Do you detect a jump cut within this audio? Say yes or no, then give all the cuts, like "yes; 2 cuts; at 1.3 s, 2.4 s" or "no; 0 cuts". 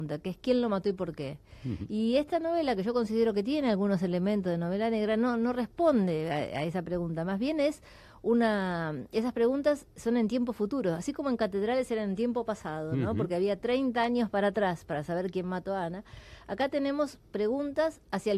no; 0 cuts